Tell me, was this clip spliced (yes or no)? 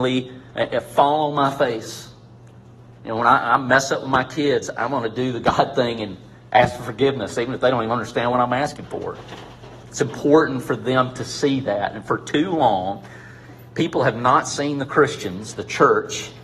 no